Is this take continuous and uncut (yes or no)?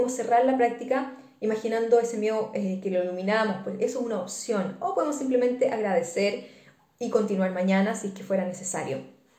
yes